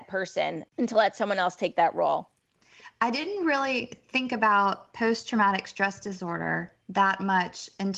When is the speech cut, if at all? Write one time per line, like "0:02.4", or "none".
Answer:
none